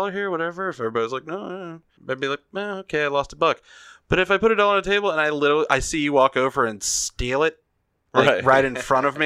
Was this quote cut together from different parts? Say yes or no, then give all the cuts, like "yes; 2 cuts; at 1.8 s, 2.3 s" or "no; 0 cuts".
yes; 1 cut; at 2.0 s